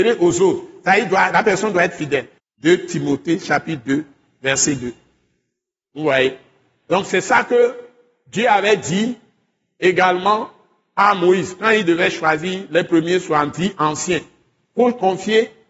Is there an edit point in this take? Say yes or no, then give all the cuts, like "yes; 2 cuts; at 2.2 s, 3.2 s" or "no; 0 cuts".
yes; 1 cut; at 2.4 s